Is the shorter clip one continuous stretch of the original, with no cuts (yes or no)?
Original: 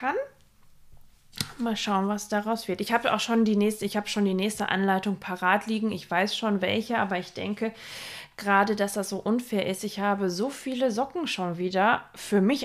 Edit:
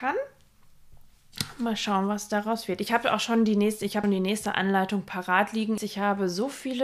no